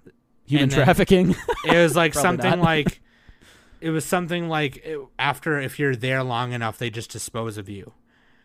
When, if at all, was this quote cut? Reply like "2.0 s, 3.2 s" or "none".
none